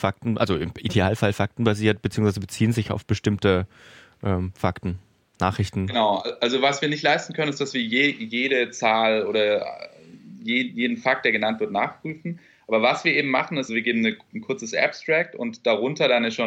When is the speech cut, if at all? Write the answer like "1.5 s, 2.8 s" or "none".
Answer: 13.7 s